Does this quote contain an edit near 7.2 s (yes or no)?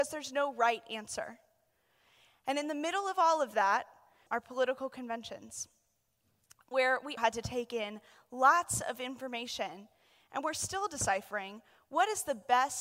yes